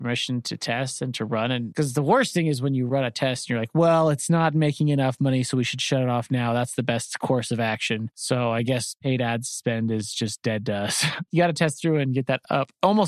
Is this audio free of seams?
yes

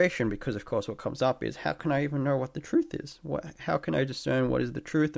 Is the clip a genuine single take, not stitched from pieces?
yes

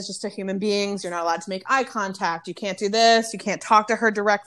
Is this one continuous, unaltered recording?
yes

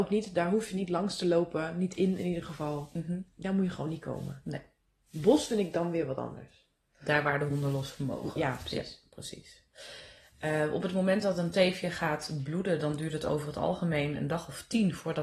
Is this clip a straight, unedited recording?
yes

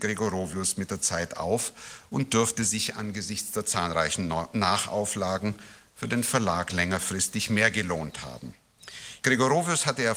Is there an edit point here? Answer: yes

